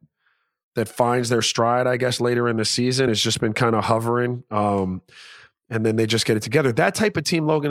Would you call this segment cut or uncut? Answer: uncut